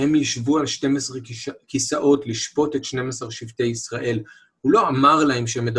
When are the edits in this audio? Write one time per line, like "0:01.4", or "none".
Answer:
none